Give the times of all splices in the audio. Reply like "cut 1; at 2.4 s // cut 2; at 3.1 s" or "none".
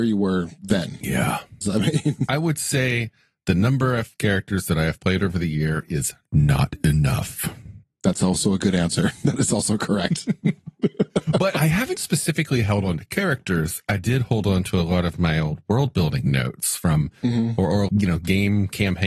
cut 1; at 1.6 s // cut 2; at 17.9 s